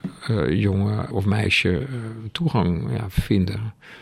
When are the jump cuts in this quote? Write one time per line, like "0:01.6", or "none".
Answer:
0:01.1